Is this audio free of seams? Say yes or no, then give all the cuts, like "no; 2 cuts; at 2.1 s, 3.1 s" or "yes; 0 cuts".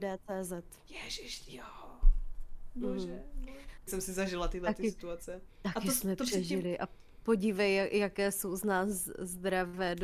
no; 1 cut; at 3.9 s